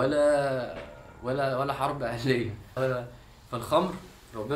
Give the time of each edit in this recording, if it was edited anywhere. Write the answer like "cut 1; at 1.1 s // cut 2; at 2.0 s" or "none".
cut 1; at 2.8 s